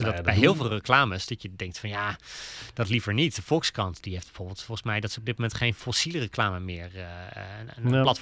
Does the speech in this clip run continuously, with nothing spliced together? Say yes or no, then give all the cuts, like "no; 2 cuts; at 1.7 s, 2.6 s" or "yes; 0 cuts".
yes; 0 cuts